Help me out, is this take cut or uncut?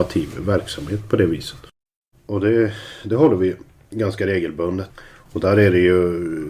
cut